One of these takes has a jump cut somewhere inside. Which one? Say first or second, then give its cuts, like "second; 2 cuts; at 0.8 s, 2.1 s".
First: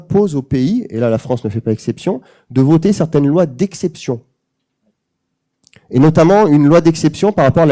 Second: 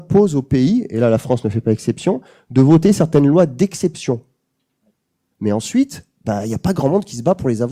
second; 1 cut; at 5.3 s